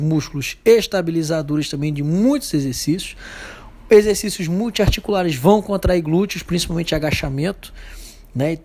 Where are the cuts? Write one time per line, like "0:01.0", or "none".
none